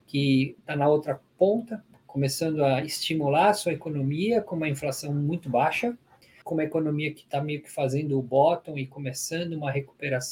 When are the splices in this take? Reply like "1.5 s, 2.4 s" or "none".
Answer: none